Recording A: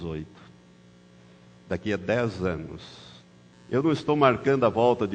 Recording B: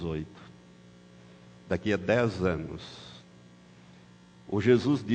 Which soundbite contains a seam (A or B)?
A